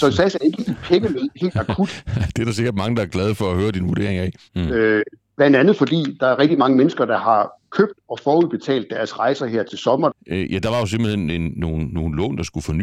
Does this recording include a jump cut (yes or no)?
yes